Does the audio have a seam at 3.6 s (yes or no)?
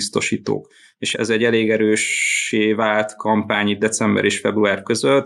no